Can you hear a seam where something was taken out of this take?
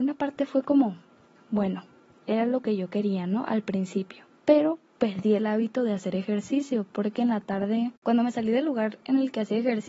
yes; 1 cut; at 4.4 s

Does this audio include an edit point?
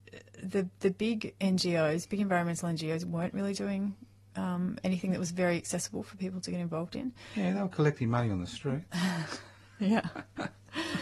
no; 0 cuts

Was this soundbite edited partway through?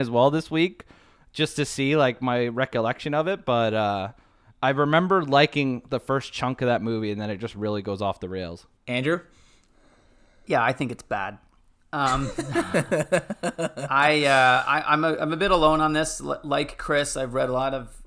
yes; 1 cut; at 8.8 s

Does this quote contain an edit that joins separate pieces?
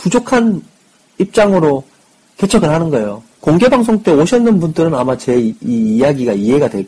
yes; 1 cut; at 3.3 s

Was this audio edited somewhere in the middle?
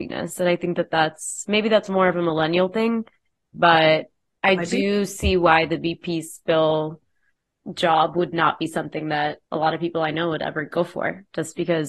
yes; 1 cut; at 9.4 s

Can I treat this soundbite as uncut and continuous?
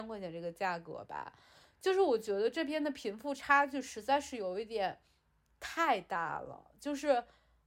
yes; 0 cuts

